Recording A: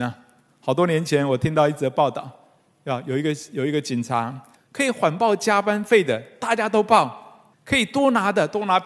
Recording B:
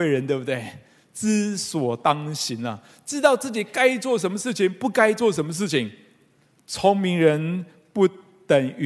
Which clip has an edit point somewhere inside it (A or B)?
A